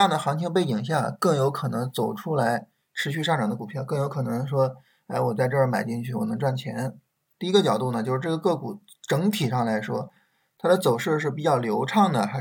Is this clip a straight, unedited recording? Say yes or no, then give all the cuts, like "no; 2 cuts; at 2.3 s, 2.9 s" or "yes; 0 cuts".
no; 1 cut; at 7.4 s